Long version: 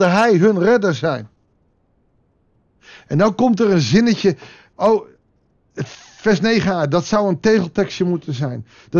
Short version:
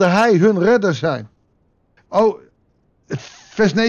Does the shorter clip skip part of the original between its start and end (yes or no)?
yes